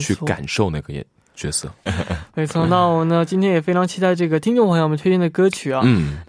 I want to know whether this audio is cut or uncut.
cut